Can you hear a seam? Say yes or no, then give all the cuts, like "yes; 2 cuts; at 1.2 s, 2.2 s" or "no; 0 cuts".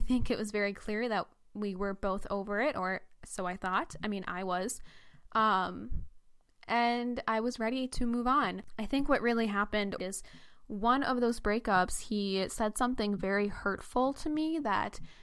yes; 1 cut; at 10.0 s